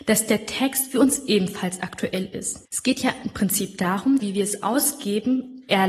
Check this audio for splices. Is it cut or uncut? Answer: cut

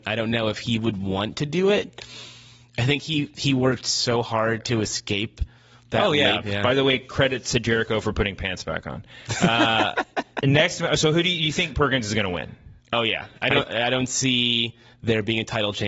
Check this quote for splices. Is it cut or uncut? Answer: cut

